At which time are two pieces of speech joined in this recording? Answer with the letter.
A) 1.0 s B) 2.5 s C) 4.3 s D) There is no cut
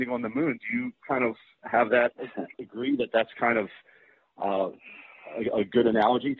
B